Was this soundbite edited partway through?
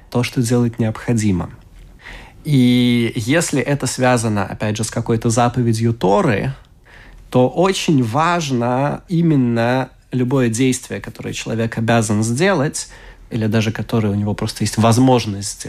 no; 0 cuts

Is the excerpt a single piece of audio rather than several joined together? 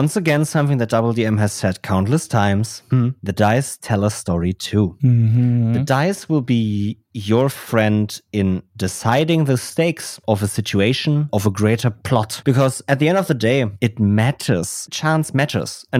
yes; 0 cuts

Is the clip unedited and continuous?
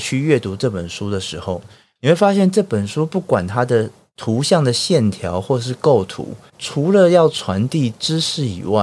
no; 1 cut; at 6.5 s

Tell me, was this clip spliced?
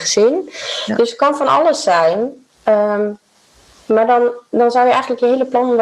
no; 0 cuts

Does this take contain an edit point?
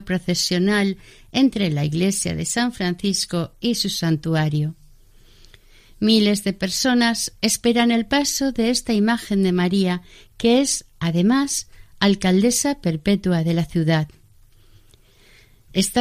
no; 0 cuts

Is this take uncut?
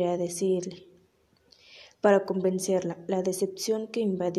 yes; 0 cuts

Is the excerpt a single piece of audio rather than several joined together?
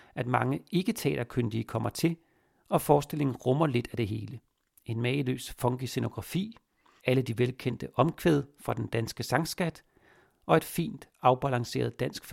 no; 1 cut; at 7.0 s

